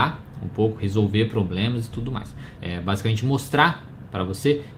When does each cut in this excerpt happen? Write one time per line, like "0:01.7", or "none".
0:02.6